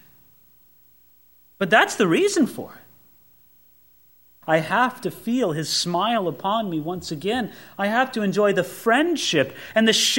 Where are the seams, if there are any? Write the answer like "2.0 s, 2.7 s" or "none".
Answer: 4.4 s